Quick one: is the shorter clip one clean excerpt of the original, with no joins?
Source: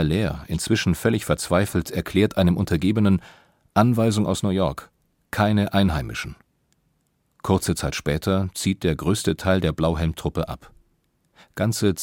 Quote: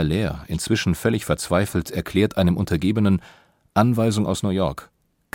yes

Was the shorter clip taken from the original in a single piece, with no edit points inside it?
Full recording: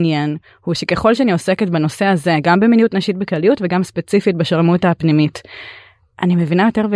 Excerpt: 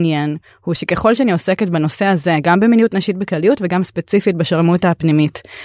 yes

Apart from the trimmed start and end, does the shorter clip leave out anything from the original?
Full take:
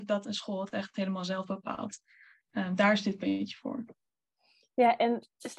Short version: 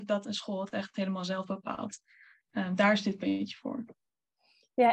no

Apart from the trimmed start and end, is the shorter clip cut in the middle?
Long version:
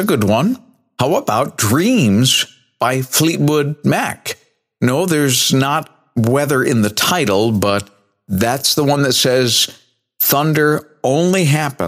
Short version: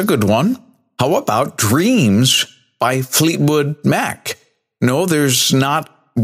no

